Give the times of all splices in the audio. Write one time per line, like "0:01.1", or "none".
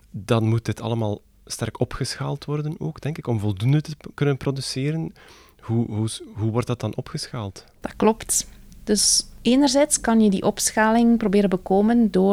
none